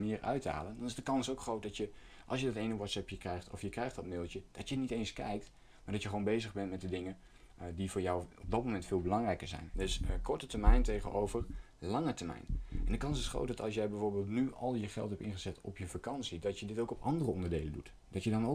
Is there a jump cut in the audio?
yes; 1 cut; at 9.7 s

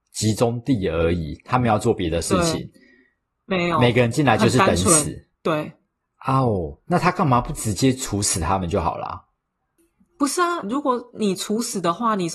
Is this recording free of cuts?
no; 2 cuts; at 5.3 s, 10.6 s

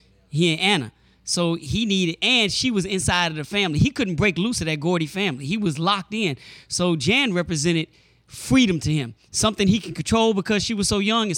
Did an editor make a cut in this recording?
no; 0 cuts

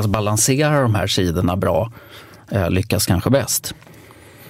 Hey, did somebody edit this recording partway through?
no; 0 cuts

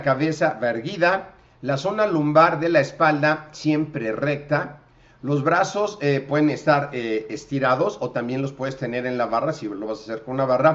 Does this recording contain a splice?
no; 0 cuts

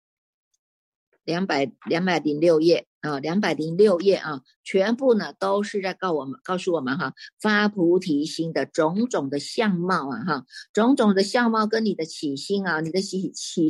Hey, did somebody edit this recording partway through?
no; 0 cuts

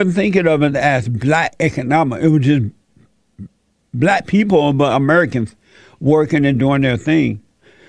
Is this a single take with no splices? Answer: yes; 0 cuts

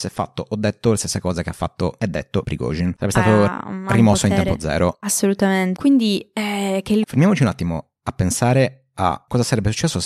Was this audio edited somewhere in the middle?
yes; 2 cuts; at 5.8 s, 7.0 s

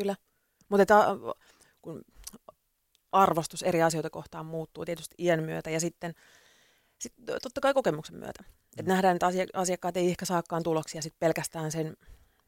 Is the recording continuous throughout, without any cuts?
yes; 0 cuts

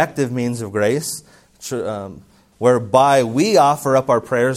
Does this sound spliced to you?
yes; 1 cut; at 2.5 s

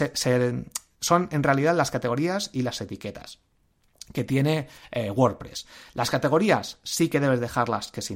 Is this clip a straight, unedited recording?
yes; 0 cuts

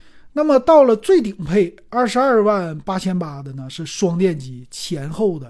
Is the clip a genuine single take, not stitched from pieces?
yes; 0 cuts

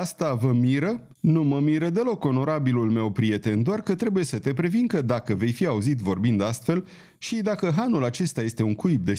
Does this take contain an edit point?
yes; 1 cut; at 1.1 s

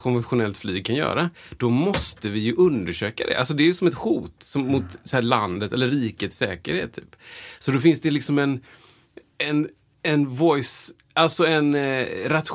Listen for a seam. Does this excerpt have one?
no; 0 cuts

